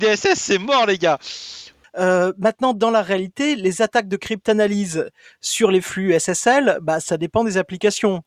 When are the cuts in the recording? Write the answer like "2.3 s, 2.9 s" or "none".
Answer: 1.8 s